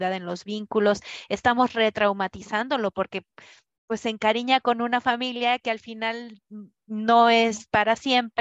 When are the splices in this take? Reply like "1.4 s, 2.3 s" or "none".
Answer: none

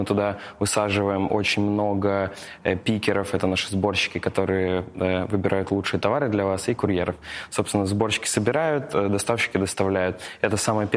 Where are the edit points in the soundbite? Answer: none

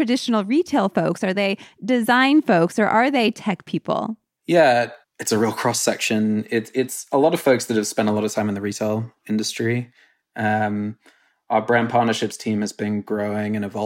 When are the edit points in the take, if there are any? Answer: none

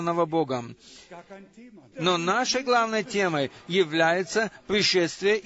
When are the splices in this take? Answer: 1.9 s

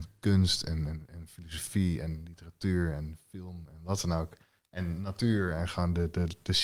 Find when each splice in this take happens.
none

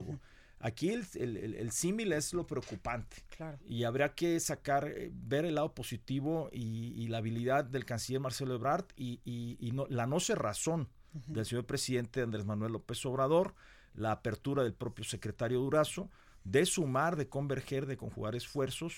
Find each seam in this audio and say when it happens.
none

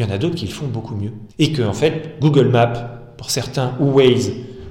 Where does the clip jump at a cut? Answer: 1.3 s

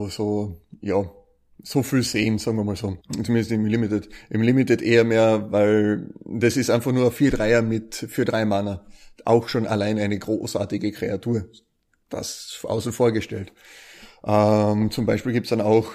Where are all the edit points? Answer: 3.0 s

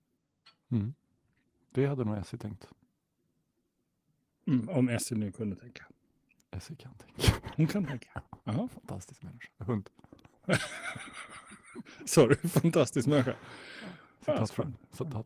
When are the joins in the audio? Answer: none

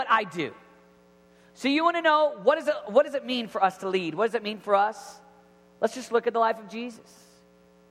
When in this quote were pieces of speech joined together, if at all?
none

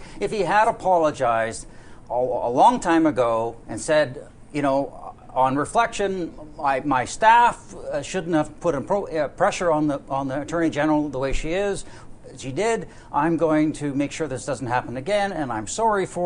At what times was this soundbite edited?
none

